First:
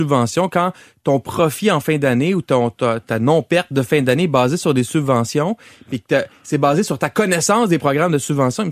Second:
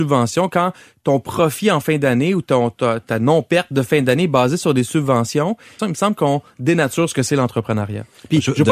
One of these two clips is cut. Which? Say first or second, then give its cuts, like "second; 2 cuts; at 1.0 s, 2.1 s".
second; 1 cut; at 5.8 s